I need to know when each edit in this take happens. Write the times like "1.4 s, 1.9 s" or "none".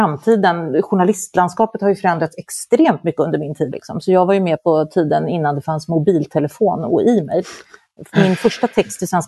3.7 s